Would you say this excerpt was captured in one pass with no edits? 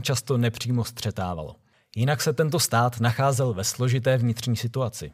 yes; 0 cuts

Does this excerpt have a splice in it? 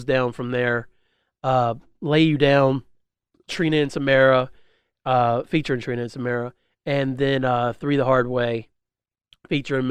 no; 0 cuts

